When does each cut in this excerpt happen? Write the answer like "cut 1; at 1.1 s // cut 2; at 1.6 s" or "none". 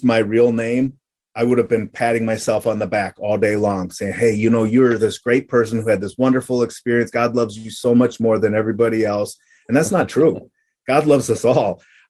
none